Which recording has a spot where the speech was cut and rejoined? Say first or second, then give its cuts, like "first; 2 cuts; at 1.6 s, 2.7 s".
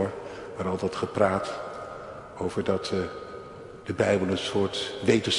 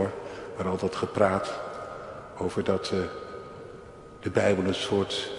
first; 1 cut; at 3.8 s